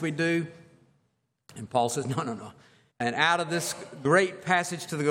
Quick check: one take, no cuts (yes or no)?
no